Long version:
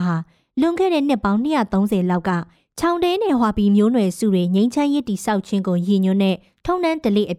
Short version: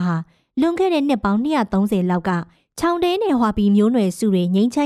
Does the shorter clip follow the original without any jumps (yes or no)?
yes